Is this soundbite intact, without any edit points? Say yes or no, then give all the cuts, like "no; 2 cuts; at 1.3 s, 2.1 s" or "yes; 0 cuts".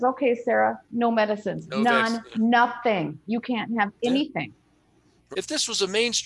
no; 1 cut; at 5.3 s